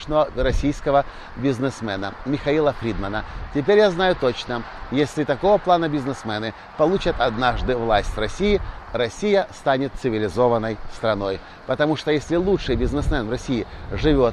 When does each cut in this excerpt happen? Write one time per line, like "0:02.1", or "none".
none